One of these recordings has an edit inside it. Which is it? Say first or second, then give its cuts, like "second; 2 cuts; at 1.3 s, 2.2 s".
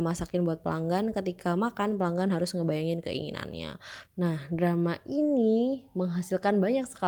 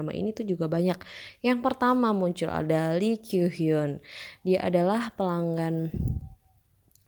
first; 1 cut; at 4.0 s